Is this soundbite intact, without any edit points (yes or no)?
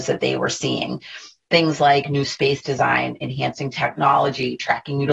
yes